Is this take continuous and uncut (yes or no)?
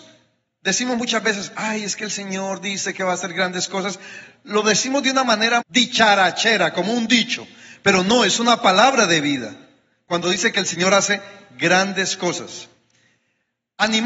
no